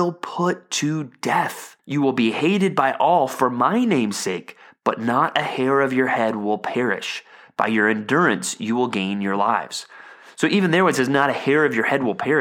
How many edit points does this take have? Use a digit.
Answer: 1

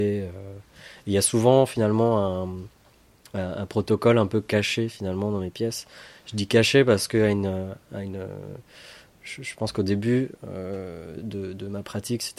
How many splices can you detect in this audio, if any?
0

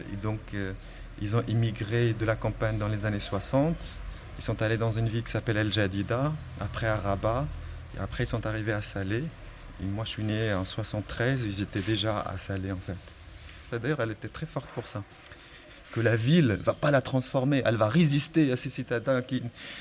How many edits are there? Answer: 2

